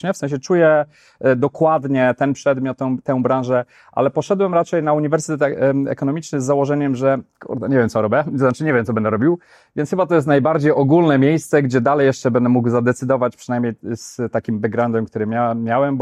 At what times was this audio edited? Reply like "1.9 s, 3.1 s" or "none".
none